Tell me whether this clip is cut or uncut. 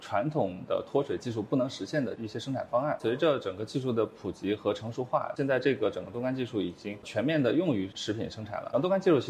uncut